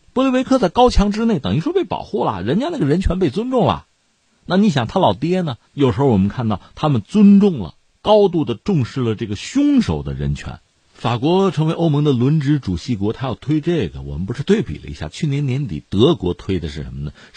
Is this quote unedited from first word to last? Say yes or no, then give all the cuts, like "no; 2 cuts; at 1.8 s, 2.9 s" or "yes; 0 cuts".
no; 2 cuts; at 5.6 s, 10.9 s